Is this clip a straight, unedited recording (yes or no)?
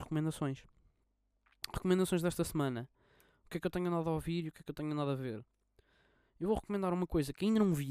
yes